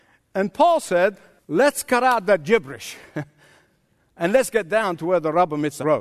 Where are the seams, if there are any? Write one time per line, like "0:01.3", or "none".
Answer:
0:01.4